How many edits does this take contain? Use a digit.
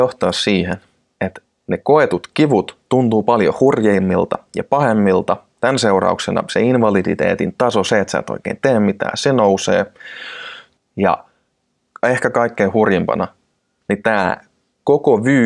1